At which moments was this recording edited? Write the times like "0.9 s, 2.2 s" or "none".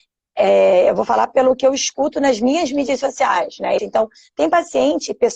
3.8 s